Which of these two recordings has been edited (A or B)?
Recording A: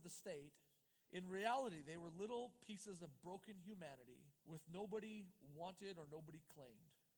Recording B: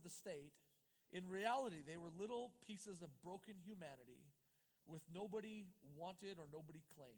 A